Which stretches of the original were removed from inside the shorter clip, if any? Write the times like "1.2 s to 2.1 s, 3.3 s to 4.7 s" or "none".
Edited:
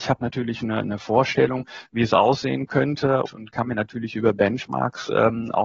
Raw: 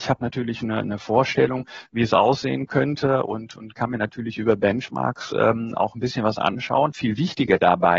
3.2 s to 3.5 s